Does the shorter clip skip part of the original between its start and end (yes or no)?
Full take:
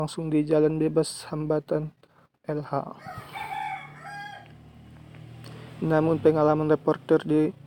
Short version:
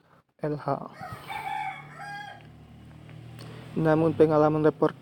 no